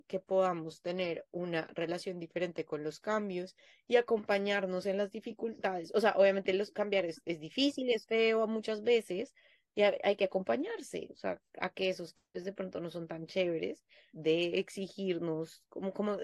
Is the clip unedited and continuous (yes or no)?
no